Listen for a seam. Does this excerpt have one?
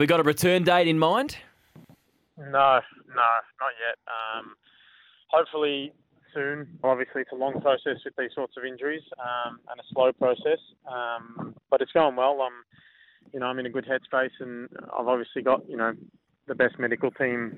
yes; 1 cut; at 6.8 s

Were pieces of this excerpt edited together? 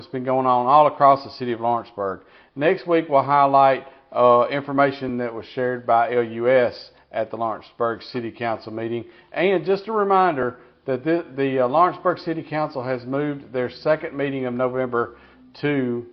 no; 0 cuts

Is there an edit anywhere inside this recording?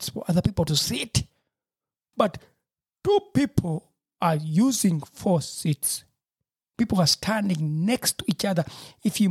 yes; 2 cuts; at 2.1 s, 6.7 s

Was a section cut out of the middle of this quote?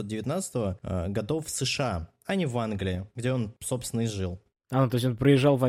no; 0 cuts

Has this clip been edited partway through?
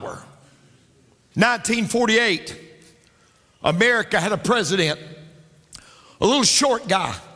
yes; 1 cut; at 1.3 s

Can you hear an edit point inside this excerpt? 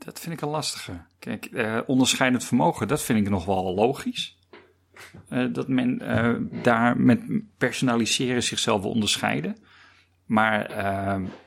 yes; 1 cut; at 1.1 s

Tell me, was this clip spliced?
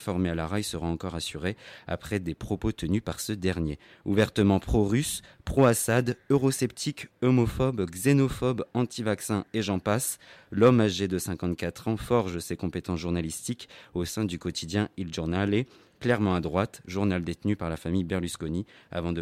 no; 0 cuts

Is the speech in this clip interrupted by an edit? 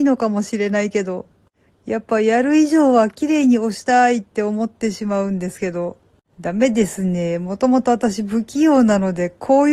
yes; 1 cut; at 6.3 s

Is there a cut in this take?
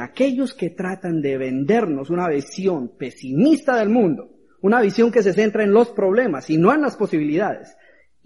no; 0 cuts

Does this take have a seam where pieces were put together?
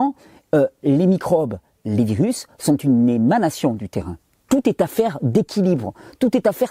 yes; 1 cut; at 4.5 s

